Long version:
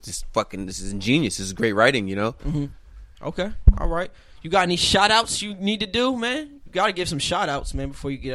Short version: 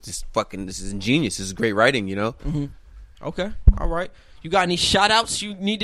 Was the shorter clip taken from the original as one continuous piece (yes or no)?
yes